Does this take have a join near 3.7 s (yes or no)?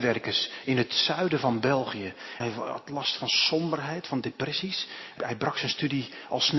no